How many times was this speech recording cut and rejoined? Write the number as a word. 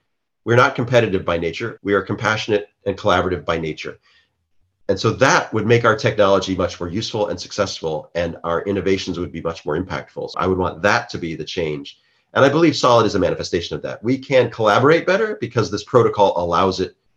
two